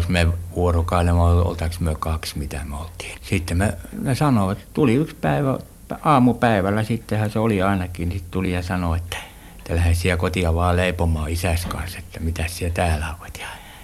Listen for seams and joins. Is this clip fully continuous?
no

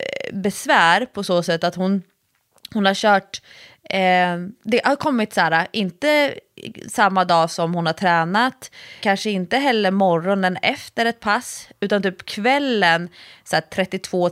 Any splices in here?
yes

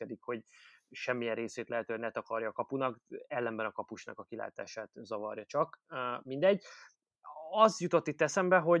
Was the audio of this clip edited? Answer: no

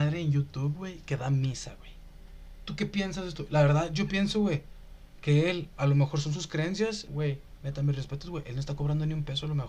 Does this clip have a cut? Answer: yes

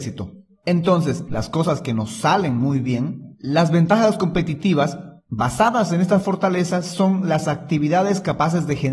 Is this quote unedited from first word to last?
no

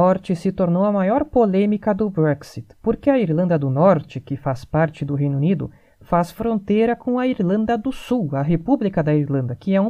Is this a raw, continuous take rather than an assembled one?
yes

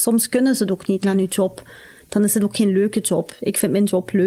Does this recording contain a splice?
yes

